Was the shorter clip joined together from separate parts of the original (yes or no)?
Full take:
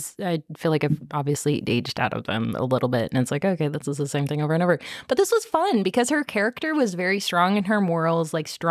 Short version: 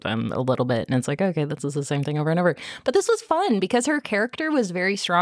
no